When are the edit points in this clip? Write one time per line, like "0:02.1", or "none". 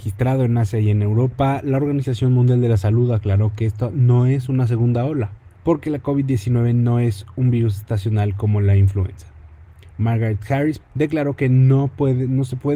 0:05.5
0:10.8